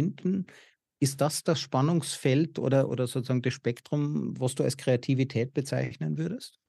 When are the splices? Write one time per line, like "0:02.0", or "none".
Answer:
none